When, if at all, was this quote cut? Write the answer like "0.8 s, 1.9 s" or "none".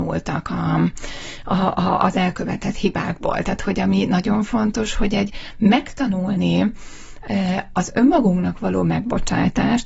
none